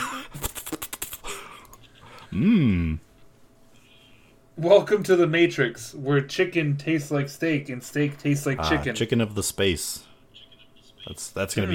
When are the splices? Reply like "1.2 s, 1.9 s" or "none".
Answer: none